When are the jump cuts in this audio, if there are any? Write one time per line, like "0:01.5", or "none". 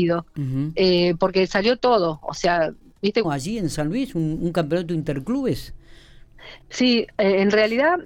0:03.2